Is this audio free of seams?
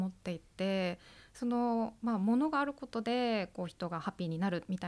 yes; 0 cuts

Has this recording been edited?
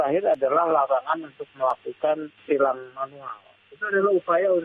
no; 0 cuts

